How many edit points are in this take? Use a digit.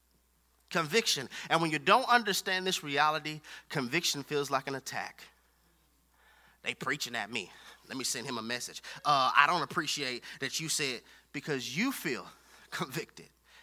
0